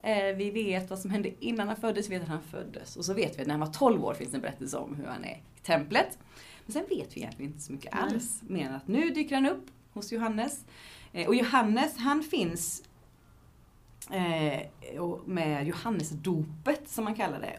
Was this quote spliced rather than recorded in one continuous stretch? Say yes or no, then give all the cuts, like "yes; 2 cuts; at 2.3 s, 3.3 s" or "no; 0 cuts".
no; 0 cuts